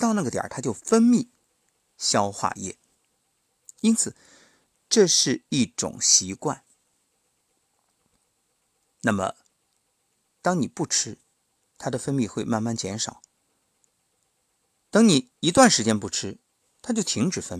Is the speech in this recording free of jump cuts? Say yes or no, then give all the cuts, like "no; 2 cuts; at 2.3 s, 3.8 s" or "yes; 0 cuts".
yes; 0 cuts